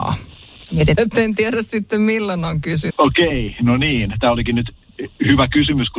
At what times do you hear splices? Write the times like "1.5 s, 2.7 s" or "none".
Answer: 0.9 s, 2.9 s